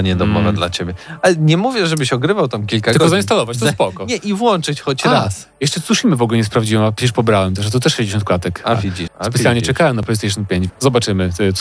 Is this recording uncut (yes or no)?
no